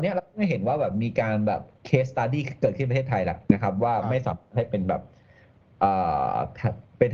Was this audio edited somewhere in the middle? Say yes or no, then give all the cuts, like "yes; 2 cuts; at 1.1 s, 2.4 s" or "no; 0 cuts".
yes; 2 cuts; at 1.7 s, 3.5 s